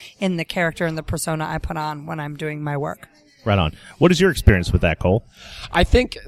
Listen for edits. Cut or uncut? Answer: uncut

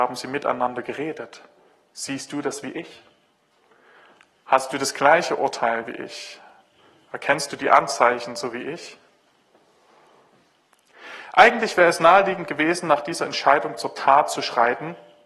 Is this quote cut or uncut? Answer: uncut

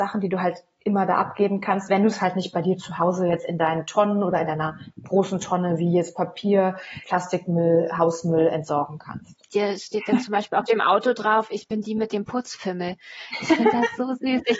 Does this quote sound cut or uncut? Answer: cut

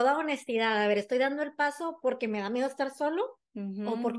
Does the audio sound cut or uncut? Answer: uncut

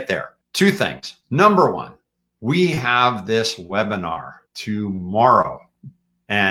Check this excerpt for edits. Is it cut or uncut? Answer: cut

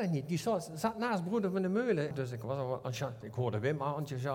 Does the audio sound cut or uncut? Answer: cut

